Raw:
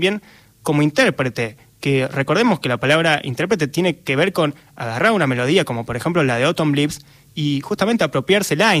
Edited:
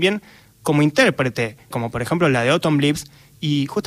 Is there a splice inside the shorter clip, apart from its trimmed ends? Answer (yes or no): yes